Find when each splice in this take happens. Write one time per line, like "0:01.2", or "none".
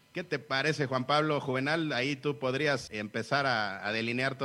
0:02.9